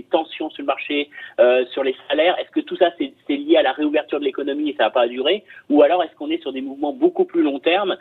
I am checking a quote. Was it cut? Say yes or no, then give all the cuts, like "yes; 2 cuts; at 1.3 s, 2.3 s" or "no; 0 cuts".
no; 0 cuts